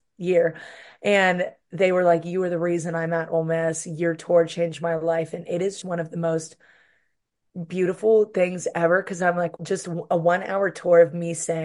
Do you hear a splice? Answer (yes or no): yes